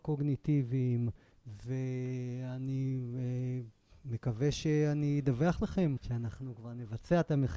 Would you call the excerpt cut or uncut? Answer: cut